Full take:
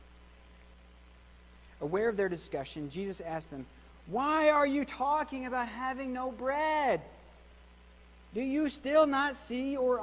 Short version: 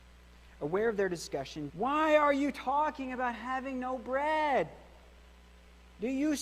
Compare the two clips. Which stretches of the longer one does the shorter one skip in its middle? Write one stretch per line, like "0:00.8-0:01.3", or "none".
0:02.9-0:04.0